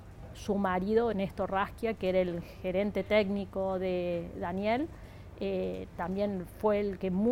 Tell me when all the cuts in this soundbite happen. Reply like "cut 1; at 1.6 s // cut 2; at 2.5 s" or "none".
none